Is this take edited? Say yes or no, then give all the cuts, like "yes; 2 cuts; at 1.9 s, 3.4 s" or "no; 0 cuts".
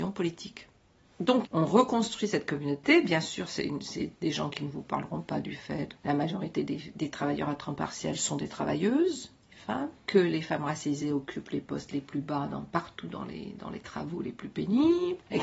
no; 0 cuts